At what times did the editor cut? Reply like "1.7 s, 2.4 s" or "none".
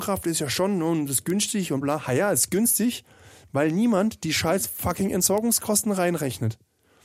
1.8 s